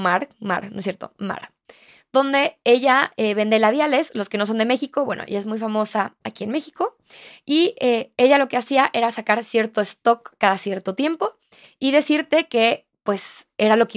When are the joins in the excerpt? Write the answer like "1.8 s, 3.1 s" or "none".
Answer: none